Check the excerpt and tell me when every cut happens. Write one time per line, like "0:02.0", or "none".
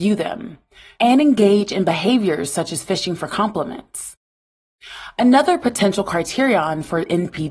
0:01.0